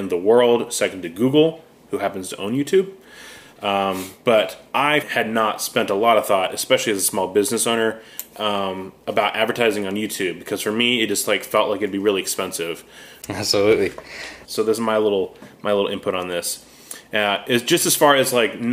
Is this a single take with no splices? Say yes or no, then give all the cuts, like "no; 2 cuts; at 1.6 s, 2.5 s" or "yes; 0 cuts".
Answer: no; 3 cuts; at 5.0 s, 13.2 s, 14.4 s